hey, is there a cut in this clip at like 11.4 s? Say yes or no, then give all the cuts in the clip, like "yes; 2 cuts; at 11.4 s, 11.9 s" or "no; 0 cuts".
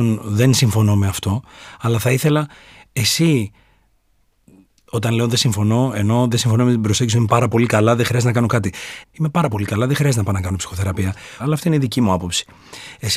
yes; 2 cuts; at 9.0 s, 11.4 s